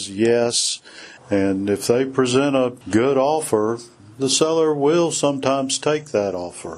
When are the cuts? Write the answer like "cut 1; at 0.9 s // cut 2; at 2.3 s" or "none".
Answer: cut 1; at 1.2 s // cut 2; at 2.8 s